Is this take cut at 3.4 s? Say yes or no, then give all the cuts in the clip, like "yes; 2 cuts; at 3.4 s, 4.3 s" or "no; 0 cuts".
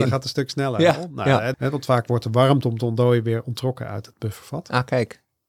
no; 1 cut; at 1.5 s